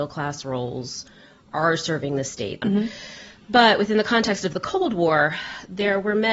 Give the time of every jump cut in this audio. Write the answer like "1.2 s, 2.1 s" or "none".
2.6 s